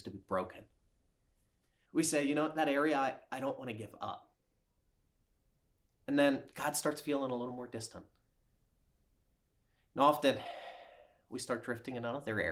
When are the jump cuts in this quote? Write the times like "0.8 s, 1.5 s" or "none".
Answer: 1.9 s